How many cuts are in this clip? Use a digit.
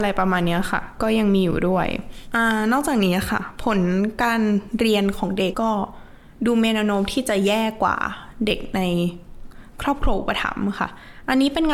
1